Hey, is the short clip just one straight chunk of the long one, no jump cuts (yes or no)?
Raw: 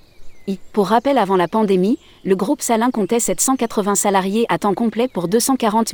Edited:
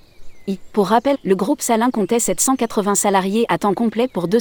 no